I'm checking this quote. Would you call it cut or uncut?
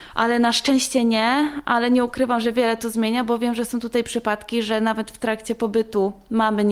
uncut